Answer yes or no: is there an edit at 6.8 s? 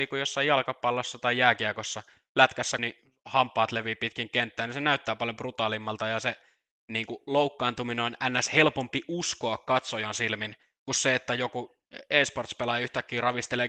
no